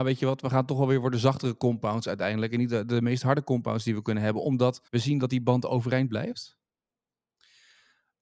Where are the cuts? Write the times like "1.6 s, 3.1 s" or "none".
4.9 s